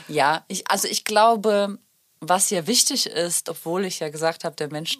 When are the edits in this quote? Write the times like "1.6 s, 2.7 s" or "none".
none